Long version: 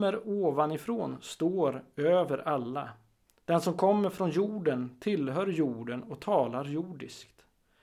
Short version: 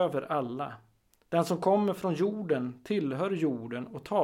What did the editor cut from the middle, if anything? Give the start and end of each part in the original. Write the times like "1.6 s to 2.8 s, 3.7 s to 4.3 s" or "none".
none